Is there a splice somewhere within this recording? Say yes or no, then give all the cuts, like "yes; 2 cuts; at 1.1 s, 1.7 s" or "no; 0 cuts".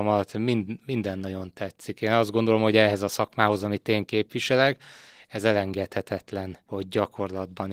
no; 0 cuts